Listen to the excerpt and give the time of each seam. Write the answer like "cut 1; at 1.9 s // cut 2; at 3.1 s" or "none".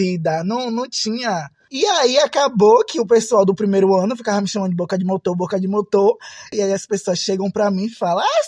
cut 1; at 1.7 s // cut 2; at 6.5 s